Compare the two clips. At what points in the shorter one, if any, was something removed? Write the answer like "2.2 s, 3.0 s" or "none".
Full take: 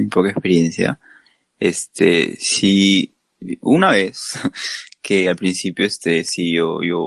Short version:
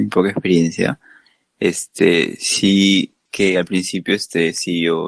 3.3 s